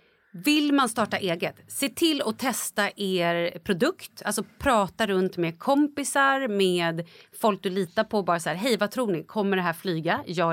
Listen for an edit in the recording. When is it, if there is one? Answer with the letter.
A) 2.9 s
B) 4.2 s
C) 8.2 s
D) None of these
D